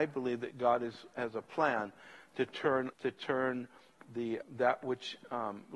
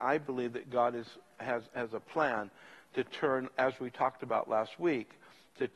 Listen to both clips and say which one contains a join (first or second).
first